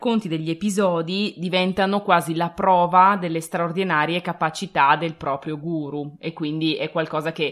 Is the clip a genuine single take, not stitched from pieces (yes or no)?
yes